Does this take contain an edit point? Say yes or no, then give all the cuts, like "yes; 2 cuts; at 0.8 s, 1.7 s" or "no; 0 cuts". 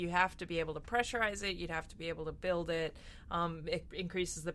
no; 0 cuts